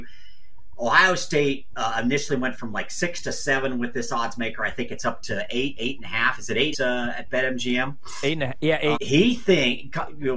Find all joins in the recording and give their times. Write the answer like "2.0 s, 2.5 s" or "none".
6.7 s, 8.9 s